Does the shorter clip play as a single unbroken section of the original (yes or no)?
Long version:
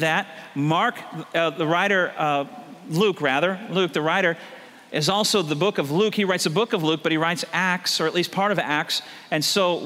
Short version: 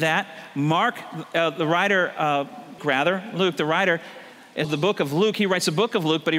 no